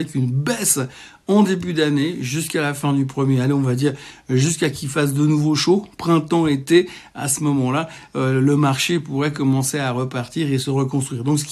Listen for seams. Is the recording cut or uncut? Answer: uncut